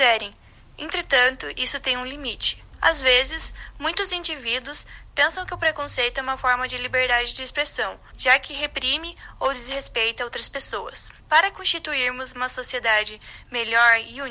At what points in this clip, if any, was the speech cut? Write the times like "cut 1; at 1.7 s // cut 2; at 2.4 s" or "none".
cut 1; at 2.7 s // cut 2; at 8.1 s // cut 3; at 11.2 s